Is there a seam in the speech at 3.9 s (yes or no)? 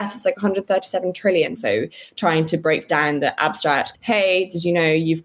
yes